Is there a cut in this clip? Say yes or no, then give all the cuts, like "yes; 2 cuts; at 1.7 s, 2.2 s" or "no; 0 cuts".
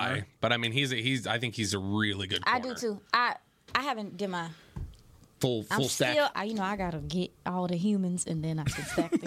yes; 1 cut; at 6.3 s